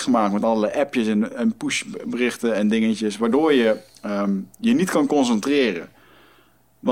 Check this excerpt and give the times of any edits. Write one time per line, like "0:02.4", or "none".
none